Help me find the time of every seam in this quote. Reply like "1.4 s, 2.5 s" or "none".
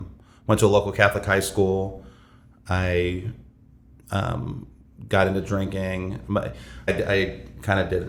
6.9 s